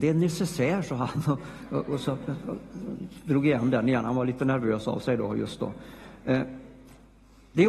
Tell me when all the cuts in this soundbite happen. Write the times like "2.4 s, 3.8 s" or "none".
none